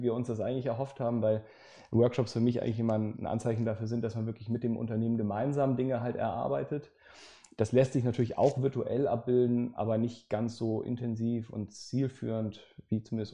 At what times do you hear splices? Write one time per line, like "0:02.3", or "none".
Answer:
none